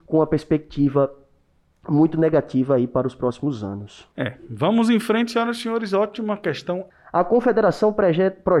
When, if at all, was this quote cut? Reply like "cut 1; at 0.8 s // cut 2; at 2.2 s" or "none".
cut 1; at 4.1 s // cut 2; at 6.9 s